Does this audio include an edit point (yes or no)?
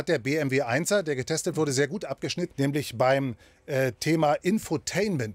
yes